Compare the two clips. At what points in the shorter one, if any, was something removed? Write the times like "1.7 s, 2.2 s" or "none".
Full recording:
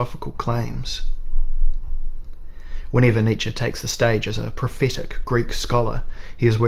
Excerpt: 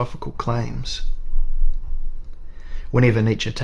none